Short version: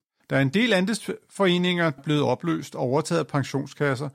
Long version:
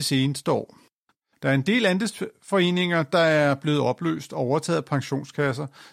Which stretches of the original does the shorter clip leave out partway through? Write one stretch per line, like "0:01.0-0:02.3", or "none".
0:03.1-0:03.6

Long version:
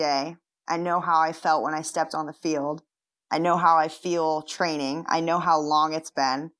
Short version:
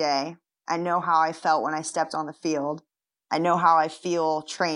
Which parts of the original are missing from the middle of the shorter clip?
none

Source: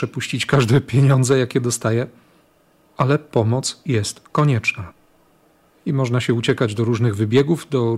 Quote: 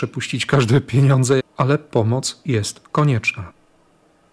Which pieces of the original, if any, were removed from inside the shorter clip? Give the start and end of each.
0:01.4-0:02.8

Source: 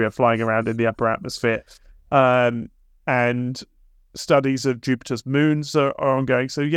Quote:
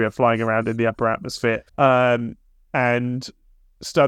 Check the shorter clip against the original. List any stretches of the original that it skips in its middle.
0:01.7-0:02.0

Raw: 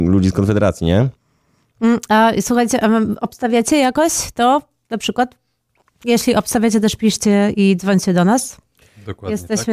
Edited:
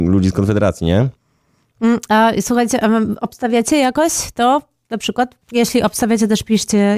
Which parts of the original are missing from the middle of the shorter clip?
0:05.4-0:05.9

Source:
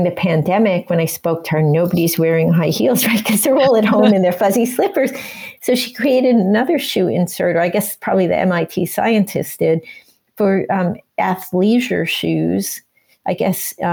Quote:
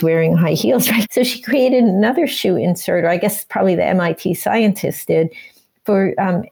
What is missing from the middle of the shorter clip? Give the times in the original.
0:03.2-0:05.6

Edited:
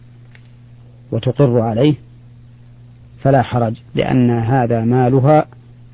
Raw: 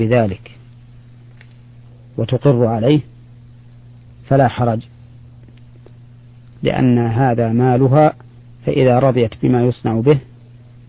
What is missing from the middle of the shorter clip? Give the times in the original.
0:04.9-0:06.6

